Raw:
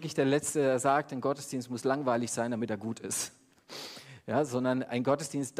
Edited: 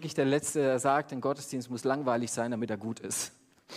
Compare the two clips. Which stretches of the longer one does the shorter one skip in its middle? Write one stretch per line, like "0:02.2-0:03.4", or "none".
none